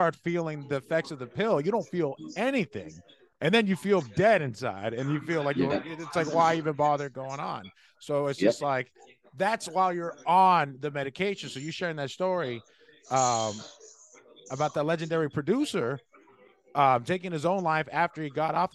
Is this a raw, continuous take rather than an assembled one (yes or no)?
yes